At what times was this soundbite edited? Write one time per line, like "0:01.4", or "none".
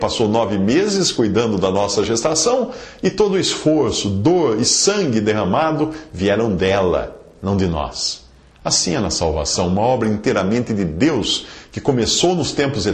none